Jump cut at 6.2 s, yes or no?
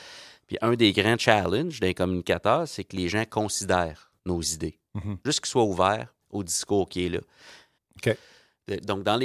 yes